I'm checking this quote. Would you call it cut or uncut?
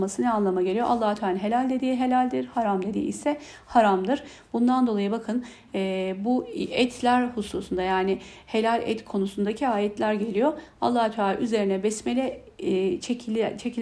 uncut